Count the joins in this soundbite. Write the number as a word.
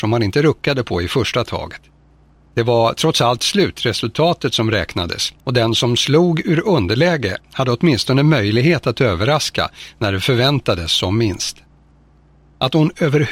two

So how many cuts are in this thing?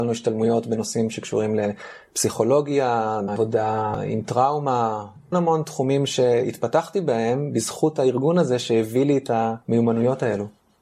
two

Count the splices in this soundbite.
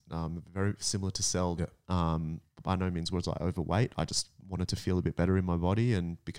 one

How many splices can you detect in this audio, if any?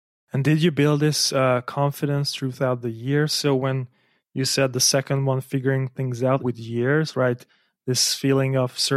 one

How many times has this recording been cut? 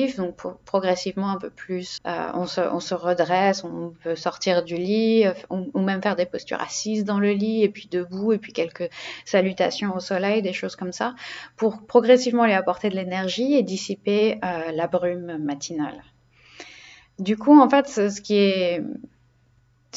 one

